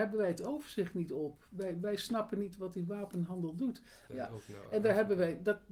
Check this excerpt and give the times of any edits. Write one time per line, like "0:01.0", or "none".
0:04.1